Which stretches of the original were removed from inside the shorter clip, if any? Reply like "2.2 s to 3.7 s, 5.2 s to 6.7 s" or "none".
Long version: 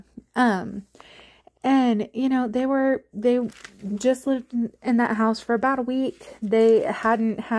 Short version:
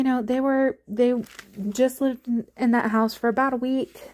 none

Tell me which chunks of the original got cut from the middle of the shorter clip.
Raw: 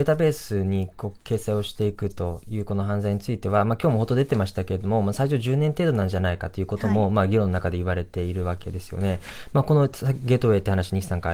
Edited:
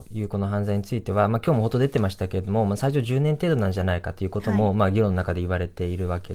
none

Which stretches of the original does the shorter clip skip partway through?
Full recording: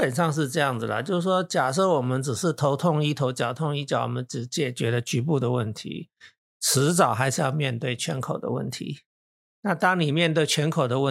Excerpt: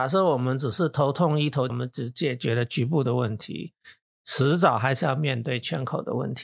3.3 s to 4.1 s

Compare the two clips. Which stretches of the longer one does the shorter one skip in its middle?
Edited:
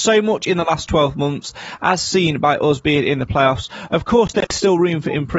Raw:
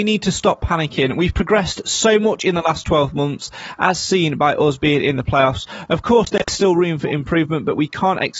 none

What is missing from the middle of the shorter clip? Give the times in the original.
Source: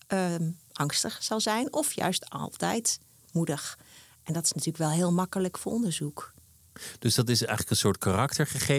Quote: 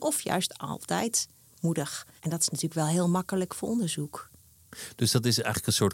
3.9 s to 4.2 s

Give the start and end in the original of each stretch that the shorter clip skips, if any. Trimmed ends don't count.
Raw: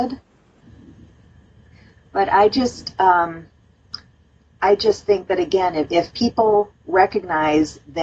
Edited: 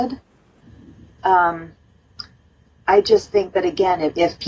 1.2 s to 2.9 s

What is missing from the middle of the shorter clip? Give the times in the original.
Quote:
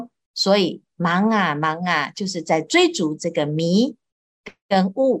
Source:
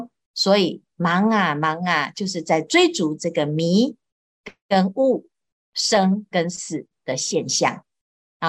none

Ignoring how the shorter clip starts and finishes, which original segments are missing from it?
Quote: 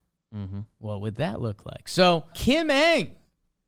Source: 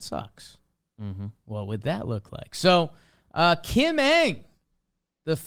3.0 s to 3.6 s

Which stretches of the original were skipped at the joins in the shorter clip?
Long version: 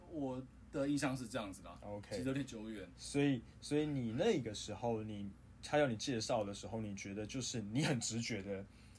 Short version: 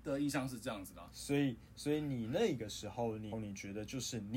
1.8 s to 2.9 s, 5.2 s to 6.7 s

